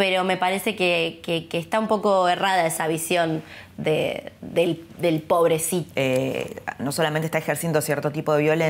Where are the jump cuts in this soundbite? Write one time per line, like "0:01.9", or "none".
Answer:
0:05.9